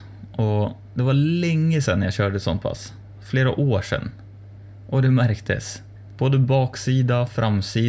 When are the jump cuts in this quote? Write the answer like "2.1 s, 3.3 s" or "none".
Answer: 6.1 s